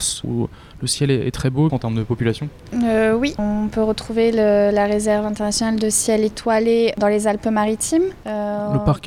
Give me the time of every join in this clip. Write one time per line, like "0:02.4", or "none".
0:01.7
0:03.4